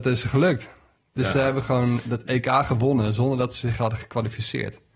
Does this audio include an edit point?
no; 0 cuts

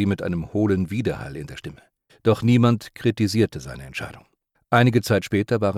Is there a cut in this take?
yes; 2 cuts; at 2.1 s, 4.5 s

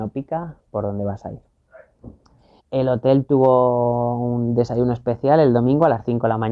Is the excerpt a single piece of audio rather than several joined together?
no; 1 cut; at 2.6 s

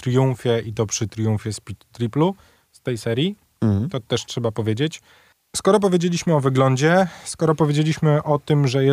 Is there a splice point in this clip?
no; 0 cuts

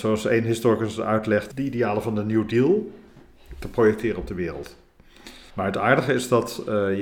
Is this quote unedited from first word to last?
no; 2 cuts; at 1.5 s, 5.5 s

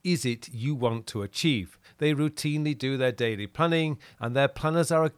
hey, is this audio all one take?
no; 2 cuts; at 1.8 s, 4.1 s

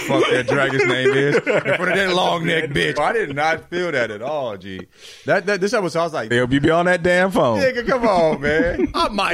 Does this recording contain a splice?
yes; 2 cuts; at 3.0 s, 6.3 s

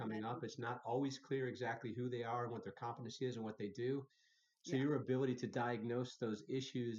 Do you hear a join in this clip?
no; 0 cuts

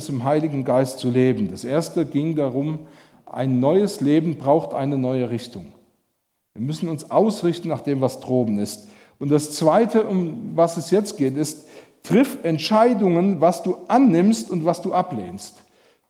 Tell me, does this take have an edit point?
no; 0 cuts

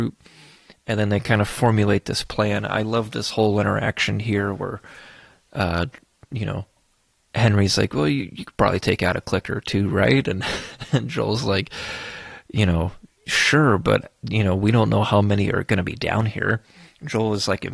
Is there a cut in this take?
no; 0 cuts

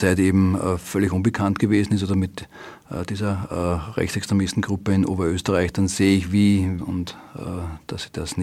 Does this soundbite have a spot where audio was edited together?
yes; 1 cut; at 6.8 s

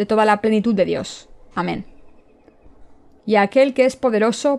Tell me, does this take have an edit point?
yes; 2 cuts; at 1.5 s, 3.2 s

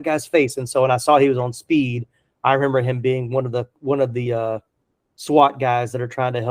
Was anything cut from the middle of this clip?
no; 0 cuts

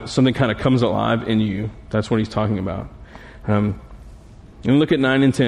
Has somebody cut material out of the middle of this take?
no; 0 cuts

